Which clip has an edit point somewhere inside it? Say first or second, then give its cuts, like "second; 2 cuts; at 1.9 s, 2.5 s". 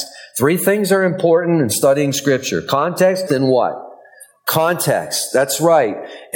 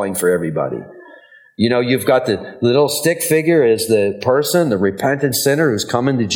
first; 1 cut; at 3.3 s